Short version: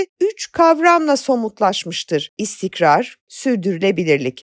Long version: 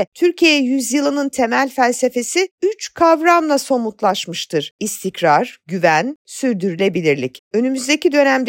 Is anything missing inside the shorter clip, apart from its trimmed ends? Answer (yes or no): yes